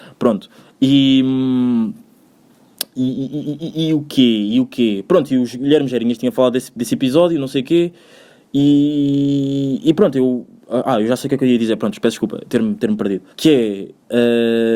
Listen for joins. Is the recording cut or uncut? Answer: cut